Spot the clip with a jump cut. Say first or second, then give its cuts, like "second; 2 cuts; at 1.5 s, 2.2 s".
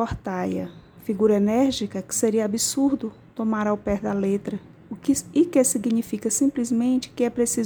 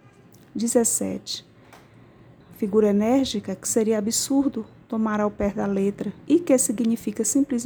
second; 2 cuts; at 2.4 s, 6.3 s